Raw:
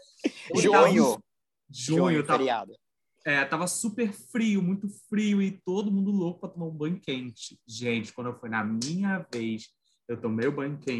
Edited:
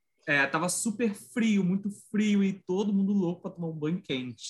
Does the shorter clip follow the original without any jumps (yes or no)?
yes